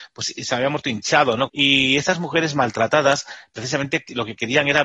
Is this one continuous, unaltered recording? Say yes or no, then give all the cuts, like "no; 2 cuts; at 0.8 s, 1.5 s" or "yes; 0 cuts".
no; 1 cut; at 1.5 s